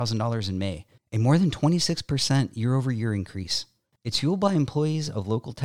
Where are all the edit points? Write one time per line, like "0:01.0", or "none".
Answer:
0:03.9